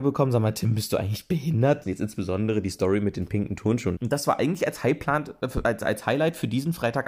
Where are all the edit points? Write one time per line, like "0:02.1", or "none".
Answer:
0:01.8
0:04.0

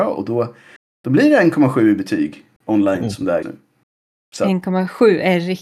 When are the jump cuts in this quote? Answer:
0:03.4

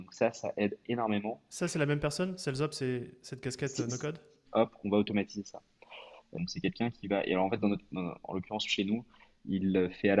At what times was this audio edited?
0:04.4
0:06.3

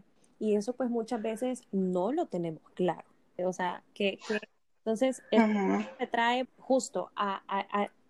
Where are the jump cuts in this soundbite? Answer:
0:03.4
0:04.7
0:06.5

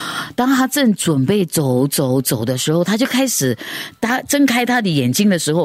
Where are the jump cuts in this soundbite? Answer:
none

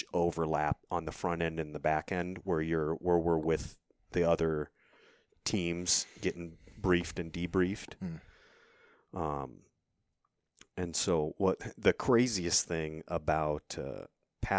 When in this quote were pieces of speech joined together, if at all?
none

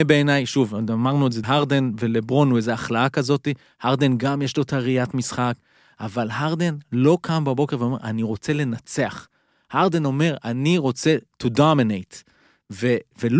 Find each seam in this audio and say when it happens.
0:01.4

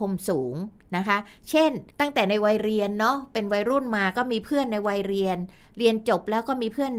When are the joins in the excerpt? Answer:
0:01.9

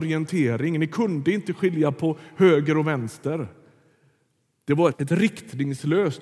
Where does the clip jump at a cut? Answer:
0:04.9

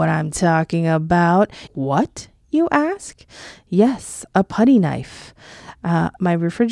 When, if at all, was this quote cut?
0:01.7

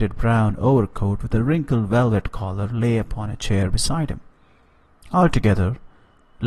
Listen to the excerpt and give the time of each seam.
none

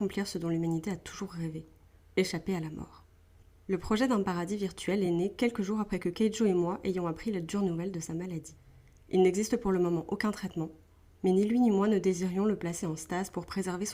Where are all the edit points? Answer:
none

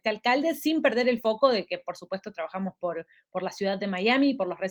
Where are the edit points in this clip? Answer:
none

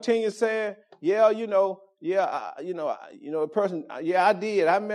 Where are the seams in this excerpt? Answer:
none

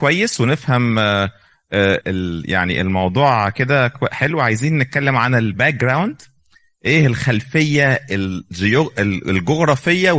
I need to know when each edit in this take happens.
0:02.0

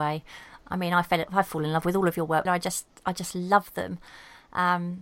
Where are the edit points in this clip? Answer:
0:02.5

